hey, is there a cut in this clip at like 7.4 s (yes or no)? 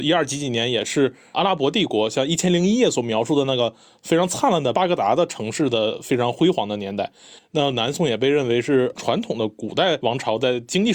yes